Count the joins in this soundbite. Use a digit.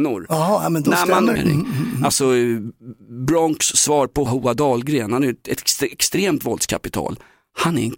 2